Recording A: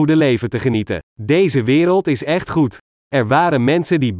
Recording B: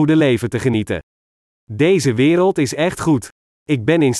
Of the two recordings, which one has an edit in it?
A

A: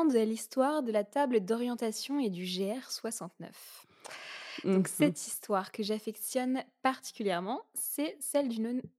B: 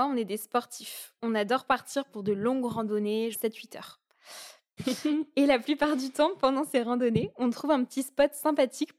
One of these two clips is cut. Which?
B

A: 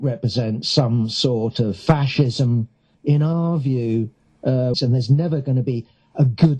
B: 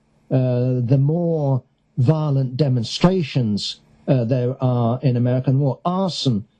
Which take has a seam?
A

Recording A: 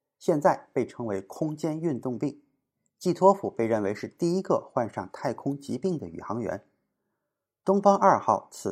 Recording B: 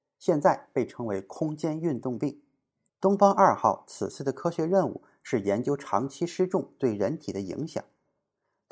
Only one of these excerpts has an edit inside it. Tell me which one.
B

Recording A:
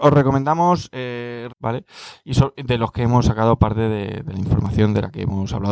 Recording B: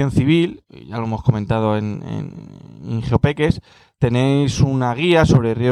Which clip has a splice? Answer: A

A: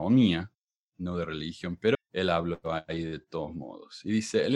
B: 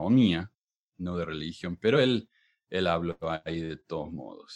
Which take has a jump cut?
A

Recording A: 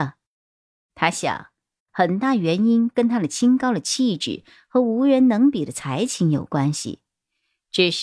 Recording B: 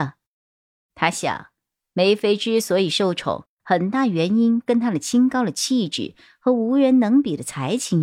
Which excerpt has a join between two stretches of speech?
A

